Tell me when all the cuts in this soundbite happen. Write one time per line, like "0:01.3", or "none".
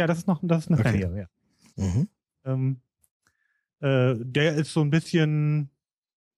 0:01.7